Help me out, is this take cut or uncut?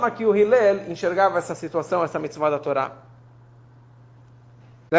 uncut